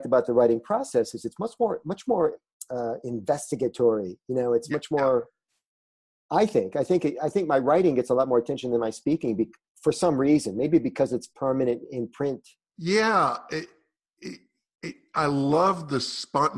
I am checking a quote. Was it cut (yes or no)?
yes